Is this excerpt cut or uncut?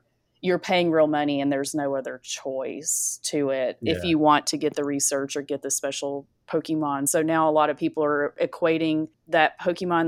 uncut